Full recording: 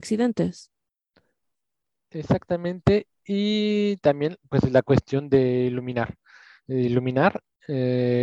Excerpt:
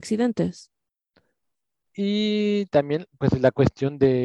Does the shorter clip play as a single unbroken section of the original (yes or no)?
no